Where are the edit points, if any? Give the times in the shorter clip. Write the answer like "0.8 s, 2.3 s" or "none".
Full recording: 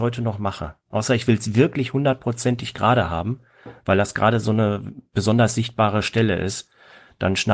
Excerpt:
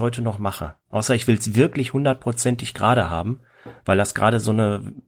none